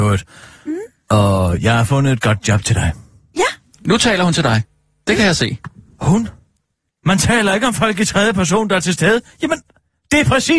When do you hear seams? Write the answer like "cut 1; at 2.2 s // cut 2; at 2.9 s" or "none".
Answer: none